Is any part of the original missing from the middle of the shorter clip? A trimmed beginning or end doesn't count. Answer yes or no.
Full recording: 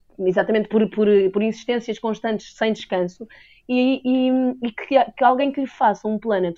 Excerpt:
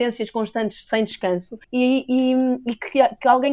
yes